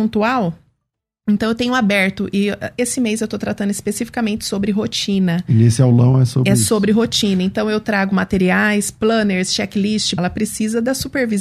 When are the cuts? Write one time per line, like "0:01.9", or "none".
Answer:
0:10.2